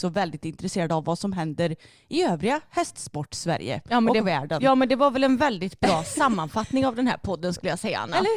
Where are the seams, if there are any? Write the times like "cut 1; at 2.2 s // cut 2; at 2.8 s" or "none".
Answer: none